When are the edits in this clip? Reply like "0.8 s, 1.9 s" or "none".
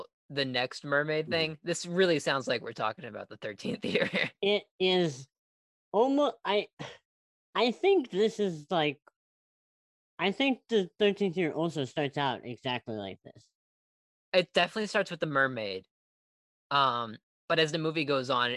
none